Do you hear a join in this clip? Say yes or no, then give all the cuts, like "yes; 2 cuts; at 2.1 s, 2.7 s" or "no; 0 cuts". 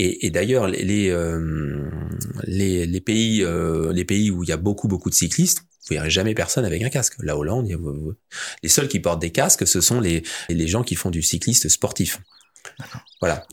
yes; 1 cut; at 10.5 s